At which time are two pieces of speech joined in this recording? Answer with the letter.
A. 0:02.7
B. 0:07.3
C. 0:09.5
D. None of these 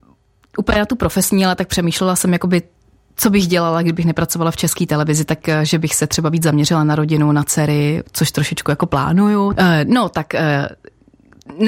C